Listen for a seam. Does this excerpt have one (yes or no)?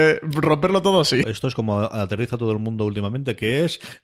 yes